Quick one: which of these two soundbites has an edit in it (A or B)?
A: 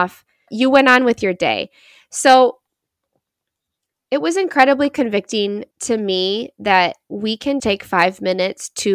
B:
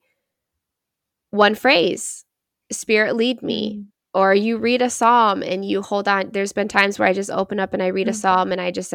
A